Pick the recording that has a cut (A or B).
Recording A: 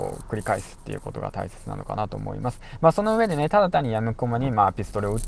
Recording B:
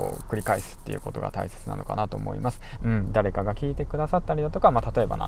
B